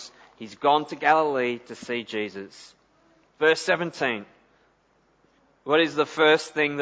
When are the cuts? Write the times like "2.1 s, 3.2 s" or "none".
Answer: 3.2 s